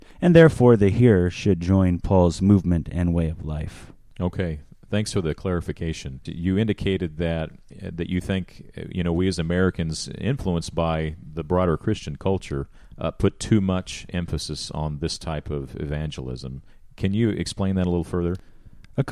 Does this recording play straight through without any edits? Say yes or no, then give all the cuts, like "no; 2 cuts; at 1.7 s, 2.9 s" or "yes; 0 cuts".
no; 1 cut; at 6.3 s